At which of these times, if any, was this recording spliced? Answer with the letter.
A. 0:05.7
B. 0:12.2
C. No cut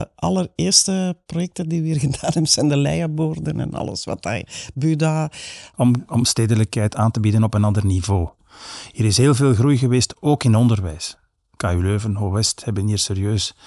A